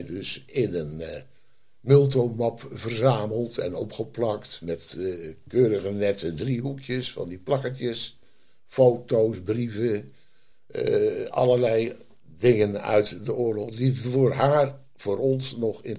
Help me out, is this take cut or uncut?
uncut